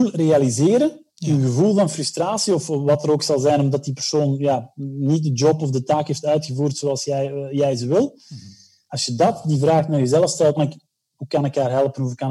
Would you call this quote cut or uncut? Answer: cut